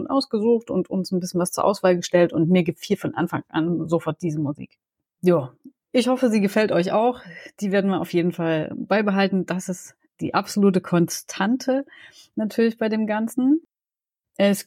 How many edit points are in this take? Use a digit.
0